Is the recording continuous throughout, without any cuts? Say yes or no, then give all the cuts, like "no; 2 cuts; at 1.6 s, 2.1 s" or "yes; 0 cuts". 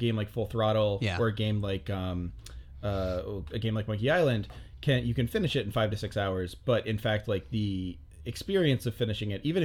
yes; 0 cuts